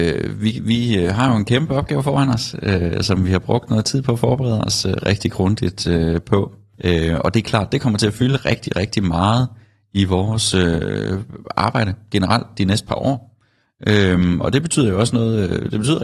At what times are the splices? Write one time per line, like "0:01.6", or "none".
0:05.0